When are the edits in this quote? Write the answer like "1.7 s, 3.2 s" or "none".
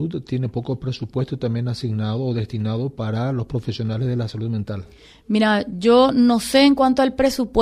none